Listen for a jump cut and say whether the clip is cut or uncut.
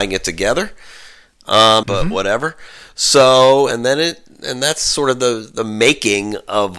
cut